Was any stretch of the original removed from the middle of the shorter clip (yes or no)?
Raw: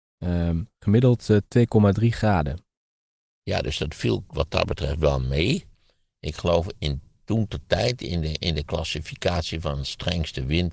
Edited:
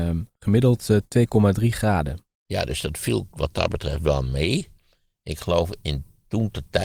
yes